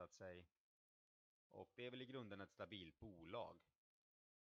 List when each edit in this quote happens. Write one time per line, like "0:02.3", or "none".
none